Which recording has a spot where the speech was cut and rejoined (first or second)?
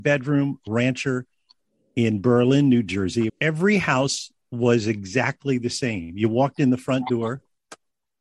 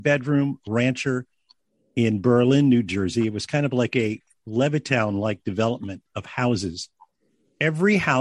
first